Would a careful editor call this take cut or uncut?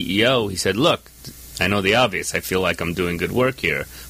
cut